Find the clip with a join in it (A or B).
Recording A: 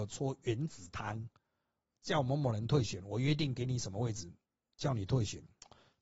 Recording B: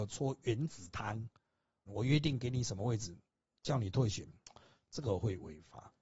B